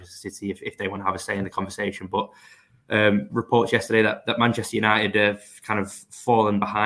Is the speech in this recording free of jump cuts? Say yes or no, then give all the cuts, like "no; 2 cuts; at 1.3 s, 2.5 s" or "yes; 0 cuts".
yes; 0 cuts